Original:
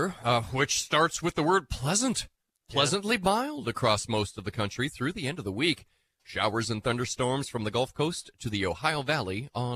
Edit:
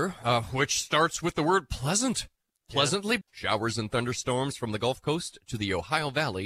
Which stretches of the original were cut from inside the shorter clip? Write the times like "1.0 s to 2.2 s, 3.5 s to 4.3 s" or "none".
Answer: 3.2 s to 6.1 s